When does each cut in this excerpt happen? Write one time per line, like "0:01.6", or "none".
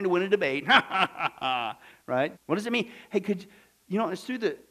0:02.3